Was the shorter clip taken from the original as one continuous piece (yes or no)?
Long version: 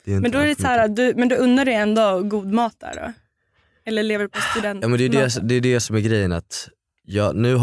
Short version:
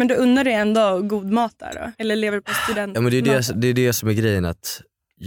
no